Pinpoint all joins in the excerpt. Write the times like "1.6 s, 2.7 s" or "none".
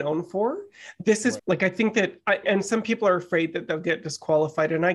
1.4 s, 2.4 s